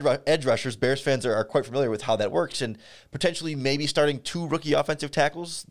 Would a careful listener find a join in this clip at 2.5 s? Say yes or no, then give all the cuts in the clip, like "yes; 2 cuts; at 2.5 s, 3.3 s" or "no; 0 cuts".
no; 0 cuts